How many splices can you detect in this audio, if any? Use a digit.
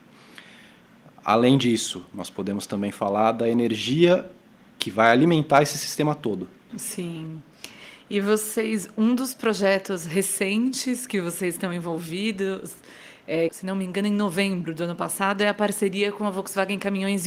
2